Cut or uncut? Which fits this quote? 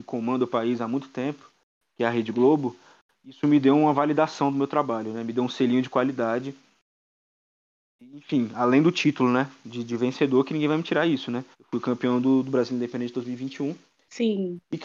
cut